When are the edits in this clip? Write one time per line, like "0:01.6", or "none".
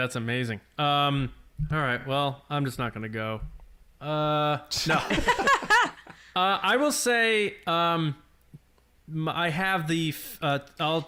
none